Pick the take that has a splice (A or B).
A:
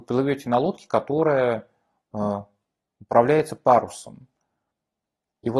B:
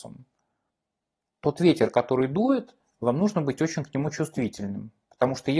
B